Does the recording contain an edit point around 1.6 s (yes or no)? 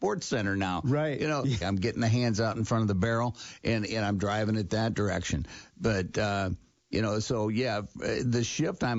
yes